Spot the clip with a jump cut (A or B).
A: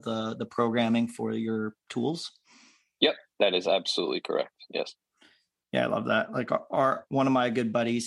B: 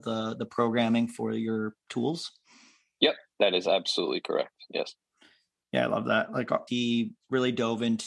B